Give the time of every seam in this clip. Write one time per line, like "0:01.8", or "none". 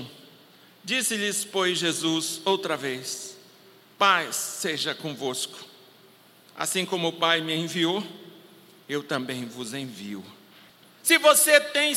0:10.8

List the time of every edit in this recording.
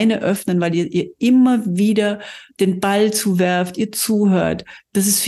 0:02.5

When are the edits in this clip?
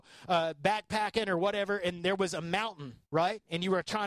0:03.0

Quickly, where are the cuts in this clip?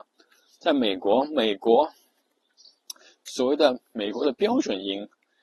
none

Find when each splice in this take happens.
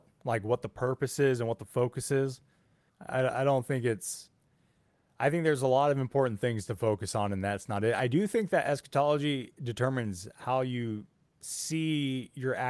0:02.9

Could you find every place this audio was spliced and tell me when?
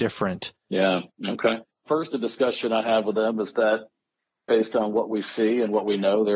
0:01.1

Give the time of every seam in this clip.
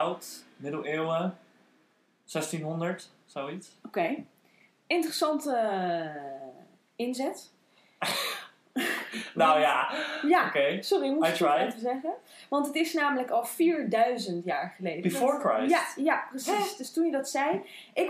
none

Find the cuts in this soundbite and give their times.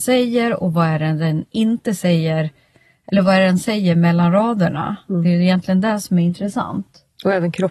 none

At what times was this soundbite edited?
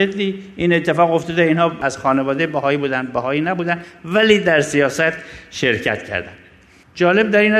none

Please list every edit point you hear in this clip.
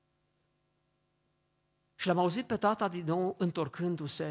0:01.9

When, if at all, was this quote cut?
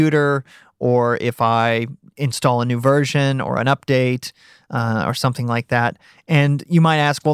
none

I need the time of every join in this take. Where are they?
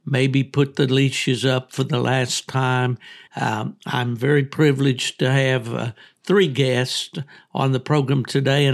0:03.3

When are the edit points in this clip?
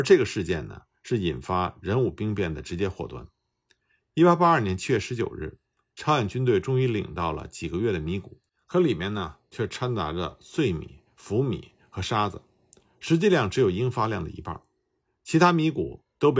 none

